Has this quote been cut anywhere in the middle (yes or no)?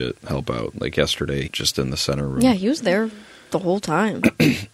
yes